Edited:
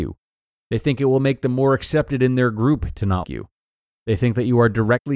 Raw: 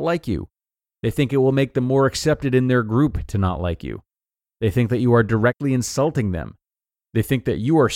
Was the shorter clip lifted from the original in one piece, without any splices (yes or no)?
no